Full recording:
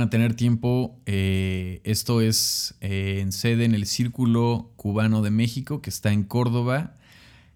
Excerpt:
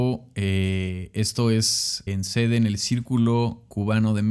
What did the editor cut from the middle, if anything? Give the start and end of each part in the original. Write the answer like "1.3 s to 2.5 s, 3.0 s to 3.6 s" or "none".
2.8 s to 3.1 s